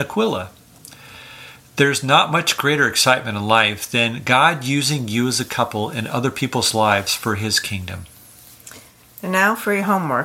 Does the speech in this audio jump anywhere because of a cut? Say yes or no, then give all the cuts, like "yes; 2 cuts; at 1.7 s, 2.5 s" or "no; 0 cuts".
no; 0 cuts